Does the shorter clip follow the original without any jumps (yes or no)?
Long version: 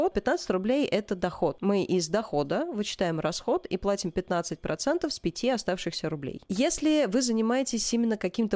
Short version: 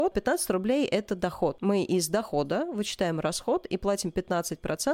yes